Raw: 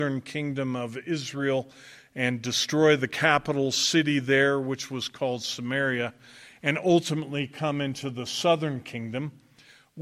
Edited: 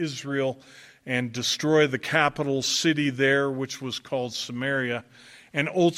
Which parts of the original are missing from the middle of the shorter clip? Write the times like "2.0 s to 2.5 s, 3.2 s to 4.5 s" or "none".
none